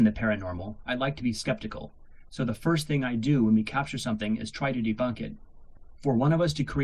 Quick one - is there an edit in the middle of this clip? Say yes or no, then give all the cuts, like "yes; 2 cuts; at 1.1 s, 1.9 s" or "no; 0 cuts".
no; 0 cuts